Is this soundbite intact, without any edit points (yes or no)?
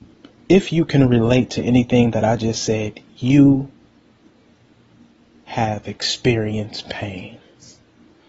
yes